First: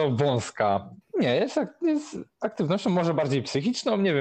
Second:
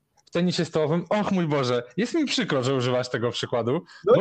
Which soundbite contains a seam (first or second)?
first